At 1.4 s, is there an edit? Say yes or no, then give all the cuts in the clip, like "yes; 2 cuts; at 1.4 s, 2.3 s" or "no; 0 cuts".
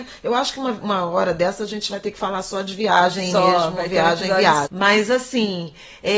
no; 1 cut; at 4.6 s